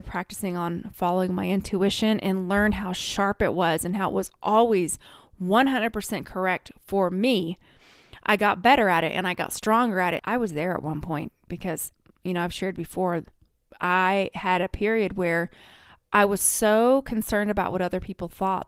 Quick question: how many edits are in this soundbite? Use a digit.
1